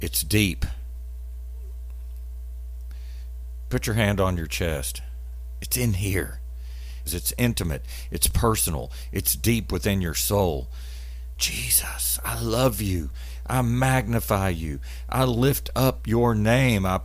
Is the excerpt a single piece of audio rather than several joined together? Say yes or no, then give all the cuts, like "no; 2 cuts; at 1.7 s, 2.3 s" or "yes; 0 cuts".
no; 2 cuts; at 7.1 s, 11.3 s